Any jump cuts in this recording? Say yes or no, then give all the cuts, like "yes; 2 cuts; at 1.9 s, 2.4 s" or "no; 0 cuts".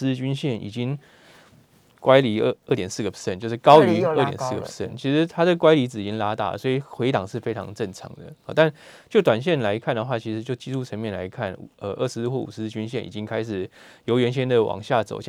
no; 0 cuts